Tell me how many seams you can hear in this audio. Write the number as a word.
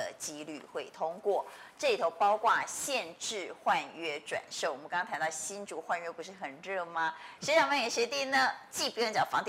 one